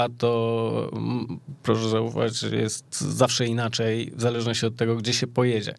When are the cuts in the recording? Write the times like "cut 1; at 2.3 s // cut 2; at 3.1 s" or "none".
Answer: none